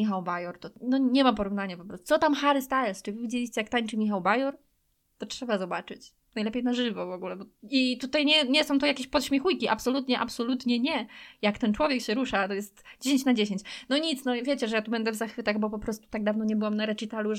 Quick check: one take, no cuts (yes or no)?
yes